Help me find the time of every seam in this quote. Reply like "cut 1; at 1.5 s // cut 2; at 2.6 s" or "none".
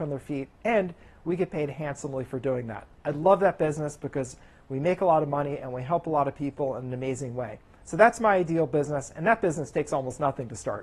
none